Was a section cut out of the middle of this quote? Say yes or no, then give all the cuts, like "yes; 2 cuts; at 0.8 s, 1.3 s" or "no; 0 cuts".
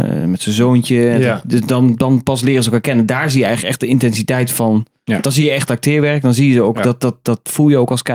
no; 0 cuts